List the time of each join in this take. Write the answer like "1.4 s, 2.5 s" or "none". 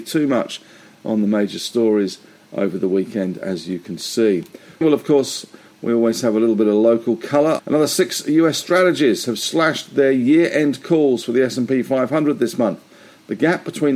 4.8 s, 7.6 s